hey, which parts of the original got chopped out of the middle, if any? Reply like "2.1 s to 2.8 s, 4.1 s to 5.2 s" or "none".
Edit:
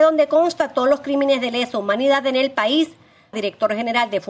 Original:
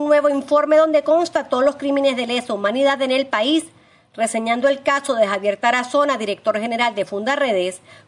4.1 s to 6.2 s